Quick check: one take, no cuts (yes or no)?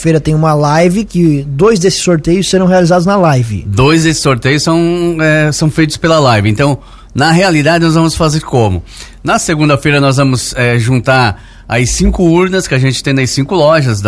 yes